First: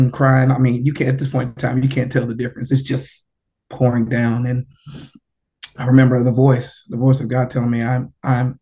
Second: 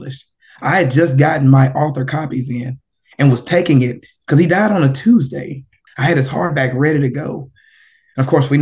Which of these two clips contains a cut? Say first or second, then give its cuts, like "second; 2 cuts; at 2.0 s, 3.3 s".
second; 1 cut; at 5.9 s